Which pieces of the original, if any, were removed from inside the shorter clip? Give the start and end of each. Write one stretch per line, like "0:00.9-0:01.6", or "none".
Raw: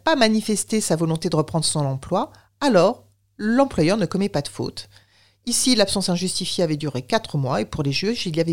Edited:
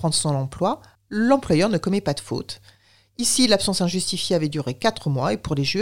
0:02.5-0:03.2